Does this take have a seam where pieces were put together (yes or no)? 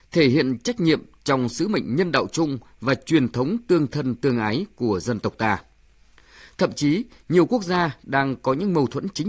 no